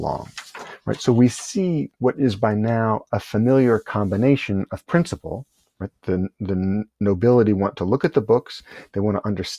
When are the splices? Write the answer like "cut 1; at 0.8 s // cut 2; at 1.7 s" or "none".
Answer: none